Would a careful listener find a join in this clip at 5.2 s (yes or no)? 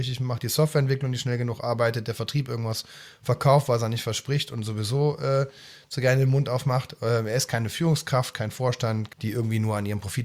no